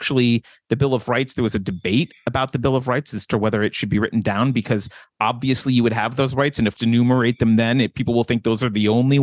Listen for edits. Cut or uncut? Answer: cut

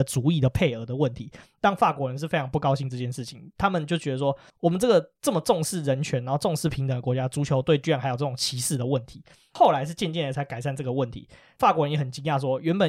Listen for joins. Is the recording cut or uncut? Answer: uncut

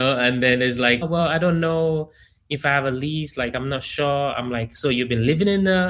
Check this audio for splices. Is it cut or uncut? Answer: cut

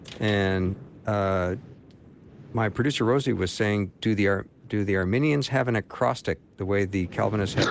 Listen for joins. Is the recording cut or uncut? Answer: uncut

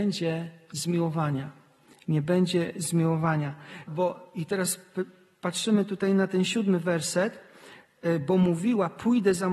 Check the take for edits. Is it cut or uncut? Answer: cut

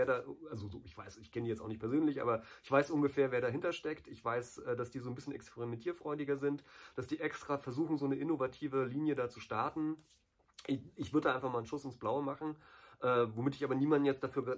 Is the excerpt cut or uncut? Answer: uncut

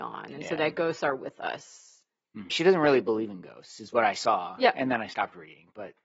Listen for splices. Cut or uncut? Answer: cut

